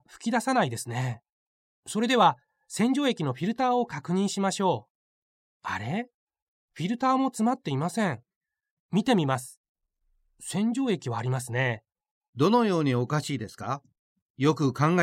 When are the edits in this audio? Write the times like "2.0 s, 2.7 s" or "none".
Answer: 8.8 s, 12.3 s